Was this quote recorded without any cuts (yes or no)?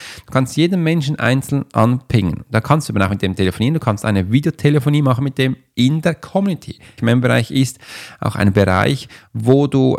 no